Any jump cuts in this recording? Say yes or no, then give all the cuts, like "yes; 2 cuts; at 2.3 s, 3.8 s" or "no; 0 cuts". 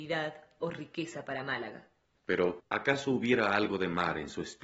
yes; 1 cut; at 2.6 s